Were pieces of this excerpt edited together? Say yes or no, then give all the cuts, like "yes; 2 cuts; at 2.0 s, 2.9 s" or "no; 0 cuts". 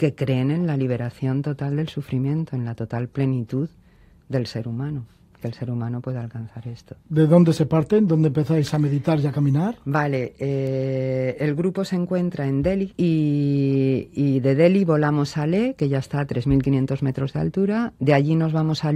yes; 2 cuts; at 12.9 s, 15.8 s